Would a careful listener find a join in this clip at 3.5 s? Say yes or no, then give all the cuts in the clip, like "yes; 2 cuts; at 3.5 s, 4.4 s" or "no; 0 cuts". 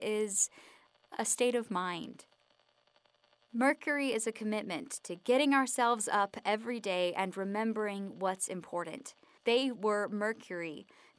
no; 1 cut; at 9.4 s